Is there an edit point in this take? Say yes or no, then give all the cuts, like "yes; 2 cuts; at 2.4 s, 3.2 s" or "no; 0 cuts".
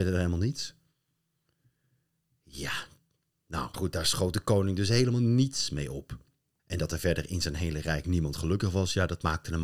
yes; 1 cut; at 3.7 s